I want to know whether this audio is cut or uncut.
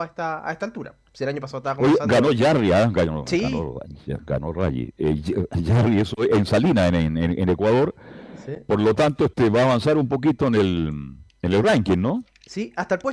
uncut